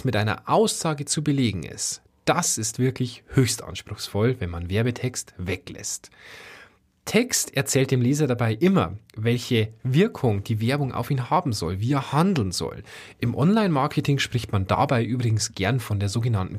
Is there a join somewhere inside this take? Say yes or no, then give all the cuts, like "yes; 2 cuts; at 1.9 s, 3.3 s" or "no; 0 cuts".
no; 0 cuts